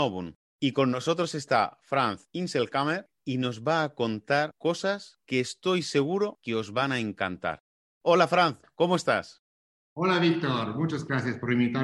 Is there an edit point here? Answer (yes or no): no